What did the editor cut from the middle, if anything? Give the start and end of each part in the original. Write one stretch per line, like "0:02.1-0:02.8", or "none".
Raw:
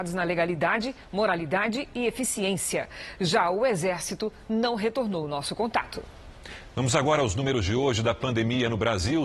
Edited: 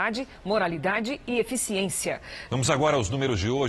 0:03.2-0:06.7